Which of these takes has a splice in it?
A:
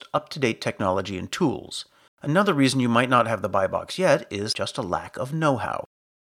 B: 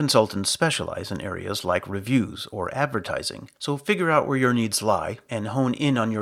A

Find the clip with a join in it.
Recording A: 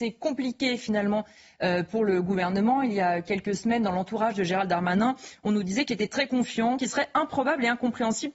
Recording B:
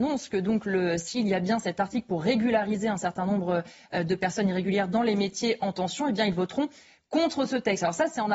A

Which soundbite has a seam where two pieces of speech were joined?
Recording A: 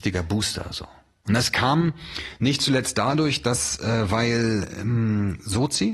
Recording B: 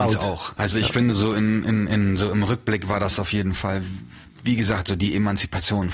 B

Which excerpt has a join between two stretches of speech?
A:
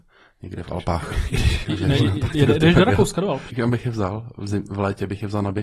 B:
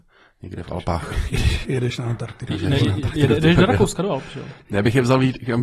A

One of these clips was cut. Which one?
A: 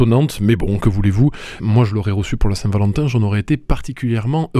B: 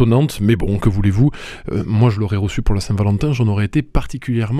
A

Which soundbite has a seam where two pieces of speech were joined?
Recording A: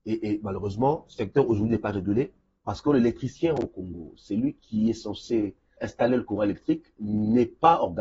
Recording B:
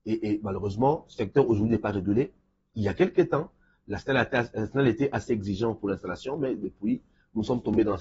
A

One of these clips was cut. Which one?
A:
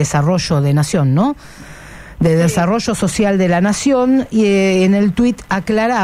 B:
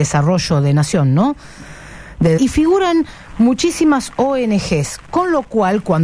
B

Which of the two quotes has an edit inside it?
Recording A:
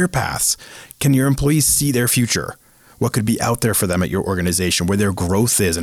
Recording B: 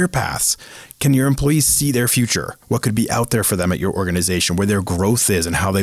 B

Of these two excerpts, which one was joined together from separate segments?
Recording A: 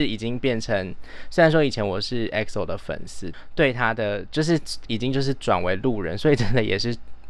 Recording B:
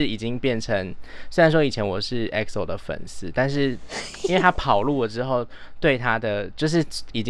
A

